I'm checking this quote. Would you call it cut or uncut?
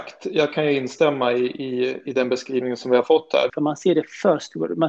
cut